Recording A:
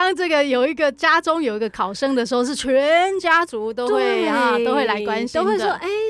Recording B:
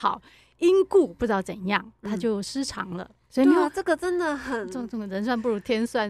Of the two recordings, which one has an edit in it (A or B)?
B